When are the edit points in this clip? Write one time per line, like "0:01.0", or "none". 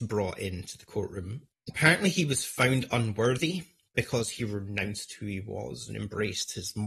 0:01.5